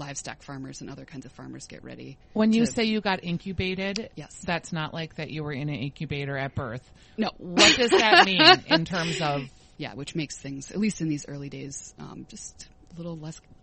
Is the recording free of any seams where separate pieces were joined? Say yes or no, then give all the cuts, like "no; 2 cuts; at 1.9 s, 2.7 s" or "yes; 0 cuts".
no; 1 cut; at 9.7 s